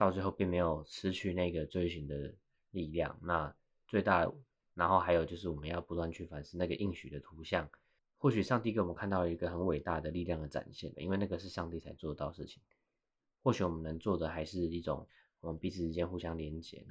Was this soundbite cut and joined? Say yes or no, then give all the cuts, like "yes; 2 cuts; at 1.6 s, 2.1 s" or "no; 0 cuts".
yes; 2 cuts; at 8.0 s, 10.9 s